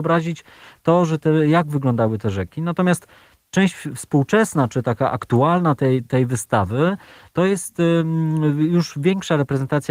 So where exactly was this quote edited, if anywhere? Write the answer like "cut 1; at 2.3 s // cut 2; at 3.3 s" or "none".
none